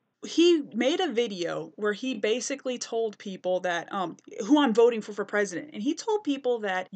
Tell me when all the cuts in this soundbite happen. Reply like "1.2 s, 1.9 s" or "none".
none